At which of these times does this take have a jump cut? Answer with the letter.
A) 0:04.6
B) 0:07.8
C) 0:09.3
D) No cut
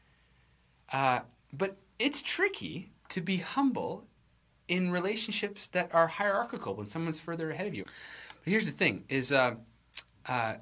B